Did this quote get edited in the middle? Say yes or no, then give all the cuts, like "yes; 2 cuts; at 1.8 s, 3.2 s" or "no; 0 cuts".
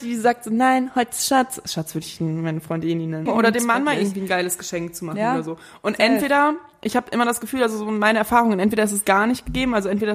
yes; 1 cut; at 3.3 s